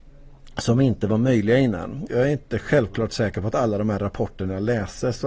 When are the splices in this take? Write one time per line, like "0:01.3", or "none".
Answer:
0:02.1